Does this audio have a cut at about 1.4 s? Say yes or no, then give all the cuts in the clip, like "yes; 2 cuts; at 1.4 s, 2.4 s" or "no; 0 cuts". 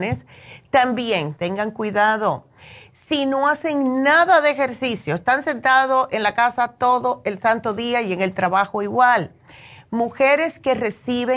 yes; 1 cut; at 1.4 s